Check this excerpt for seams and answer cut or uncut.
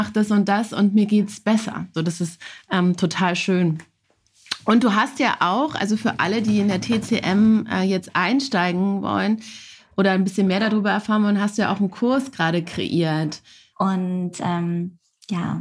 cut